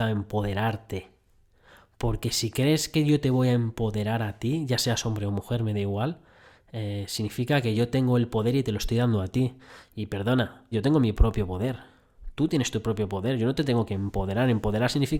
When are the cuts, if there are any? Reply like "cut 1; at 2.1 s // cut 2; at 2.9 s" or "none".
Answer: cut 1; at 10.7 s